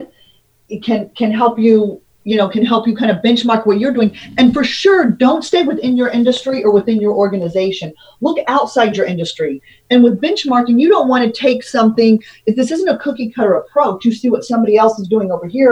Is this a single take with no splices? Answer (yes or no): yes